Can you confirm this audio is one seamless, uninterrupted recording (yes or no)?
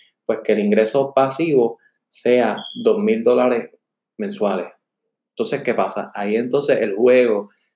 yes